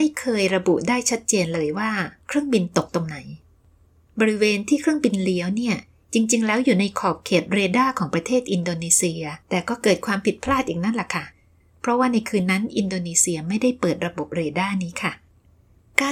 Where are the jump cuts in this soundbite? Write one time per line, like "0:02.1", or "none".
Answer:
0:09.4